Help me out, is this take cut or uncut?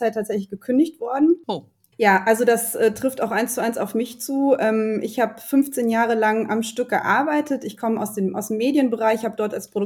cut